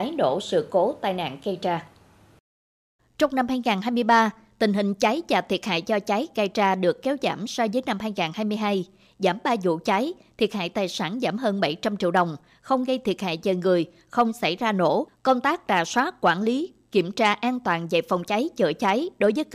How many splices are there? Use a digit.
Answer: 0